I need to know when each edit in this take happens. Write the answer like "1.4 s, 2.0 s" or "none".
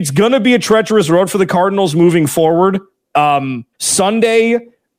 3.7 s